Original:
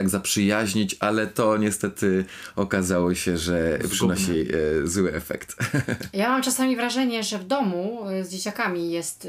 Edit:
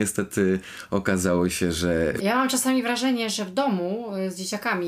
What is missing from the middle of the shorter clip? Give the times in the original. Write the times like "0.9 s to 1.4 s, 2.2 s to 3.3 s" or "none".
3.8 s to 6.1 s